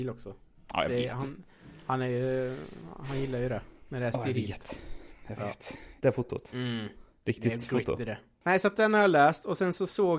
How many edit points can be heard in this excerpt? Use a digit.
1